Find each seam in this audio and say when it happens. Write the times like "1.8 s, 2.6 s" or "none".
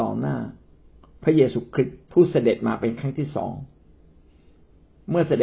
2.0 s